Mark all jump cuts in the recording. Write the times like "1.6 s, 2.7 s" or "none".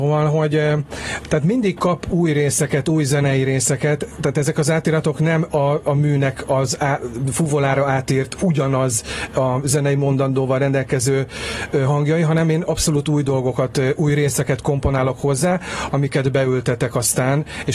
none